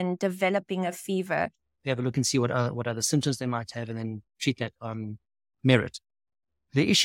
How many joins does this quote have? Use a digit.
1